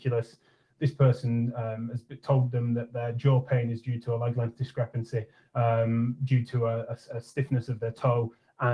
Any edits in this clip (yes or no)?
no